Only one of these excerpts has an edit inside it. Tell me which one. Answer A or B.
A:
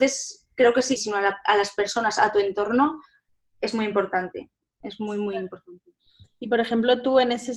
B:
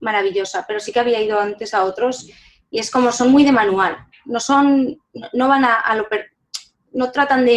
A